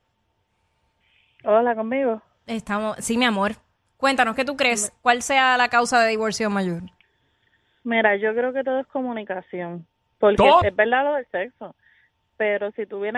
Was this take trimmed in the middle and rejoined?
yes; 1 cut; at 10.6 s

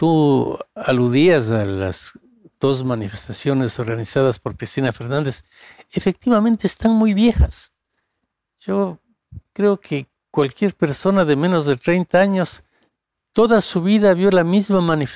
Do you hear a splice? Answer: no; 0 cuts

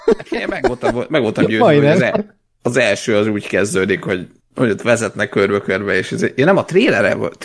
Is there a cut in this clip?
no; 0 cuts

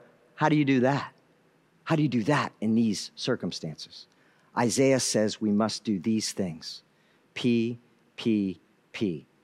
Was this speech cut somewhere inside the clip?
no; 0 cuts

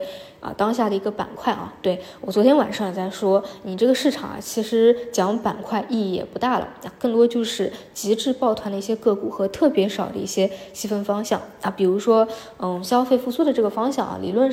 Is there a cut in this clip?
no; 0 cuts

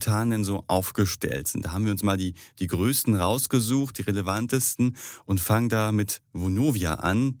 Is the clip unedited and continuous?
yes; 0 cuts

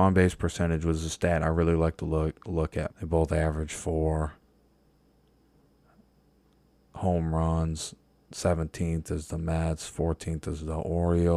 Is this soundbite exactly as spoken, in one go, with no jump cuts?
no; 1 cut; at 2.9 s

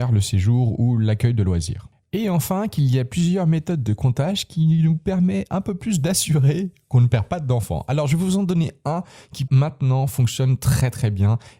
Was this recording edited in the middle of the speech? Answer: yes; 1 cut; at 9.5 s

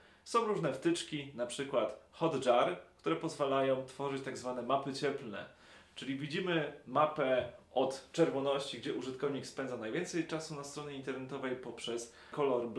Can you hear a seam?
no; 0 cuts

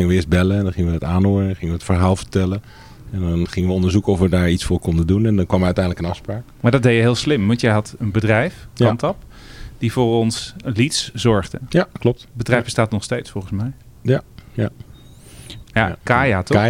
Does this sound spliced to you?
yes; 2 cuts; at 10.6 s, 15.6 s

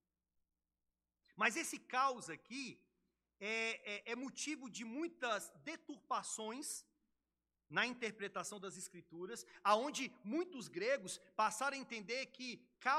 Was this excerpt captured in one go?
no; 1 cut; at 1.2 s

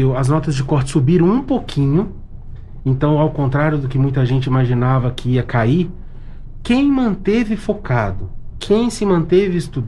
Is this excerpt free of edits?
yes; 0 cuts

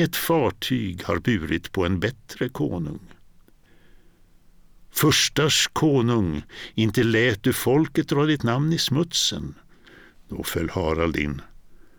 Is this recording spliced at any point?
yes; 1 cut; at 10.1 s

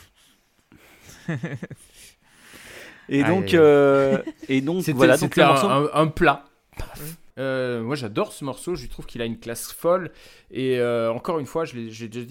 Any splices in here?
yes; 1 cut; at 7.3 s

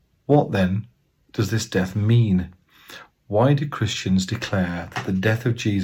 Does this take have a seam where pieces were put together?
no; 0 cuts

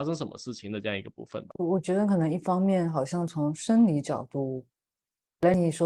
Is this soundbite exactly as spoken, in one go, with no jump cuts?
yes; 0 cuts

